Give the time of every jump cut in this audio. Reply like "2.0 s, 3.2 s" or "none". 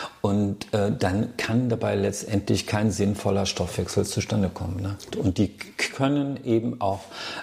5.1 s